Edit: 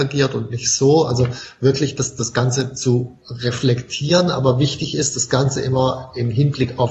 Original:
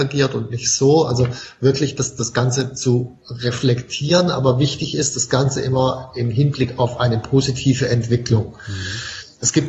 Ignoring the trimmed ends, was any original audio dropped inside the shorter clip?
no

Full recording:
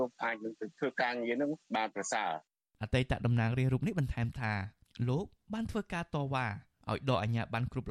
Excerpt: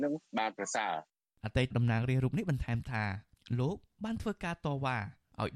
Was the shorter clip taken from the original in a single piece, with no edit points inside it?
no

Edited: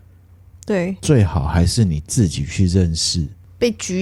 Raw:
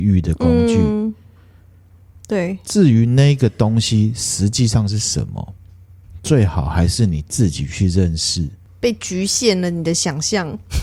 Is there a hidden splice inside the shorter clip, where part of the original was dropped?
yes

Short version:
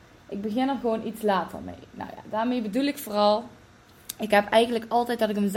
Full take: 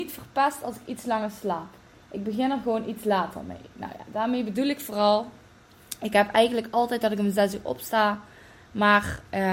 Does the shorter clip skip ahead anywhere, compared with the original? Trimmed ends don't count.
no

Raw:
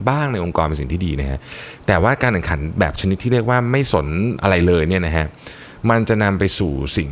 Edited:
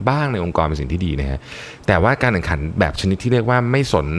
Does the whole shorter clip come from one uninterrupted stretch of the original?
yes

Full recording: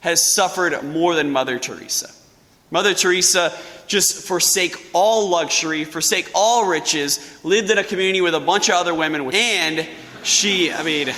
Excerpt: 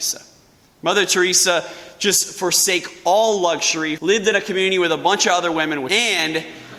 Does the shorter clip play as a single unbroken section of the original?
no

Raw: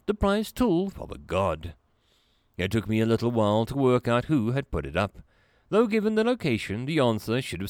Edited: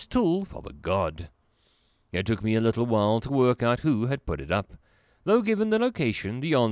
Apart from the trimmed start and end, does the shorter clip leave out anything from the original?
no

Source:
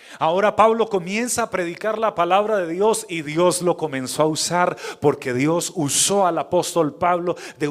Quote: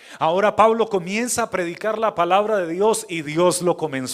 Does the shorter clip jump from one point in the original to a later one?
no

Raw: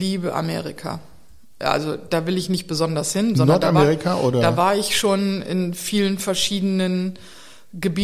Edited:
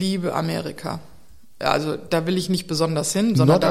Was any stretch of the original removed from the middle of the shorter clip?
no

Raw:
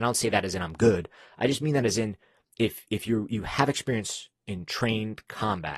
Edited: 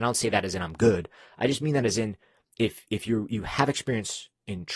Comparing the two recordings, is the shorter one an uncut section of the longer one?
yes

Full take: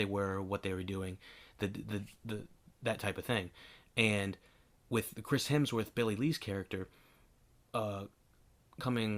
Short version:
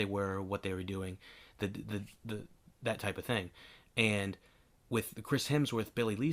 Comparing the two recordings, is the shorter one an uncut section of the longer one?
yes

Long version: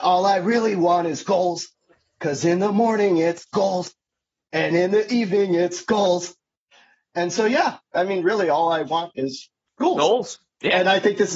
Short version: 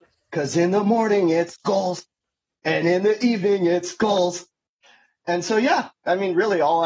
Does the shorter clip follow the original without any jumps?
yes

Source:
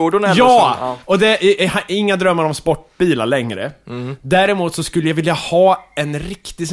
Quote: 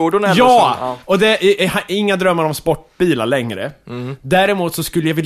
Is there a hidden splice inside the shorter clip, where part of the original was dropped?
no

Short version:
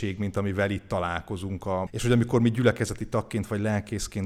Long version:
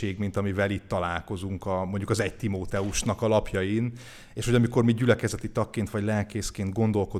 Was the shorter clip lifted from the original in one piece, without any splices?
no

